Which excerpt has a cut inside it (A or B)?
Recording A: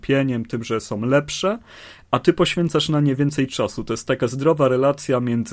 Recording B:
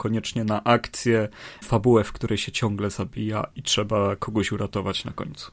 B